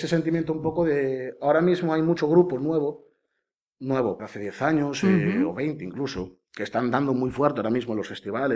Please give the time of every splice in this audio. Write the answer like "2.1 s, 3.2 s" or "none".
4.2 s